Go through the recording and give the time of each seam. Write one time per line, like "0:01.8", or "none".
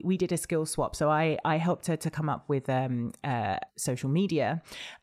0:03.7